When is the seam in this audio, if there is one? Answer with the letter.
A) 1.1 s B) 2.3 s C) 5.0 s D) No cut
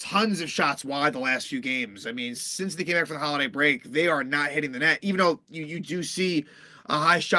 B